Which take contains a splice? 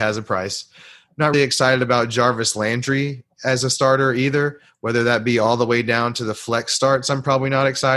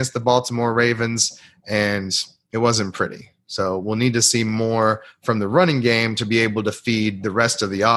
first; 1 cut; at 1.3 s

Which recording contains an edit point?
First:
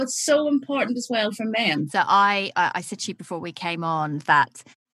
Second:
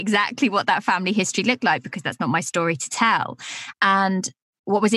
second; 1 cut; at 3.7 s

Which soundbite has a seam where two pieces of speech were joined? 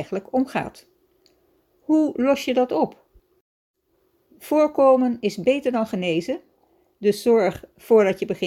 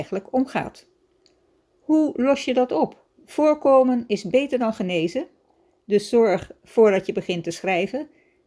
second; 1 cut; at 3.1 s

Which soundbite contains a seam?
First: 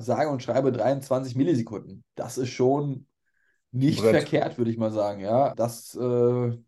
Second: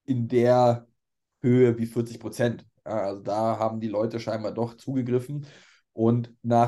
first; 1 cut; at 5.5 s

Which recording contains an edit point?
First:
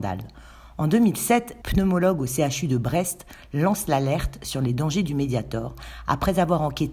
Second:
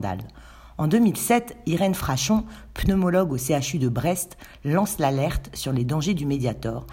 first; 1 cut; at 1.6 s

